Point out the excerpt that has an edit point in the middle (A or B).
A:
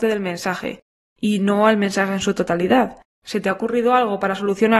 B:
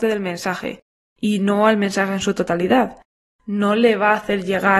A